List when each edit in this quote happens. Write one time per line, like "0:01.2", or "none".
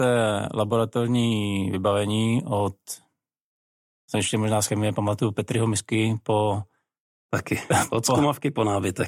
none